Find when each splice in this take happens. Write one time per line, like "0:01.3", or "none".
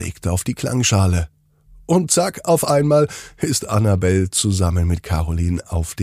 none